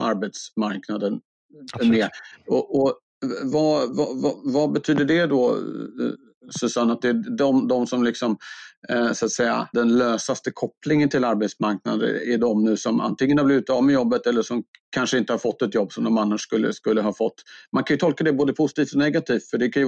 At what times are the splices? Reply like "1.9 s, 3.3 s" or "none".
9.7 s